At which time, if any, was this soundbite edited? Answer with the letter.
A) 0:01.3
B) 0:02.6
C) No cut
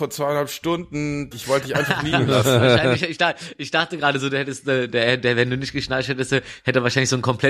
A